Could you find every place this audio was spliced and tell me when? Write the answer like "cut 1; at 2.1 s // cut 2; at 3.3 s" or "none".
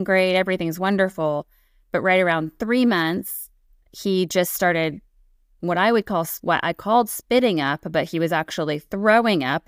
none